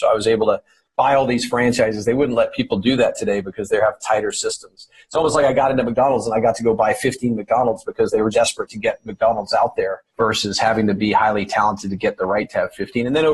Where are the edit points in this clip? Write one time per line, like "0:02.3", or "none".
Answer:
0:08.3
0:10.1